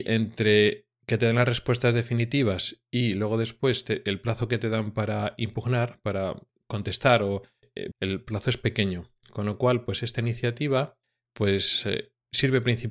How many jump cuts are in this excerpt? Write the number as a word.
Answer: one